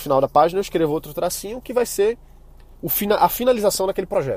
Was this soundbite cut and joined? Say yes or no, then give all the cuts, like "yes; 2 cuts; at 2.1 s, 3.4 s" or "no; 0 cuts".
no; 0 cuts